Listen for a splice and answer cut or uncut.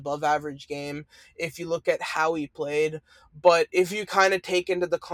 uncut